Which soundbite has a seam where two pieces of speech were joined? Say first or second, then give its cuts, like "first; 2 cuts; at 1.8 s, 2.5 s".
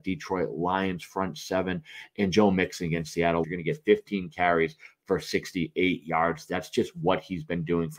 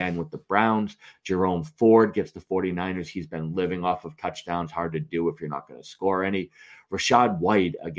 first; 1 cut; at 3.4 s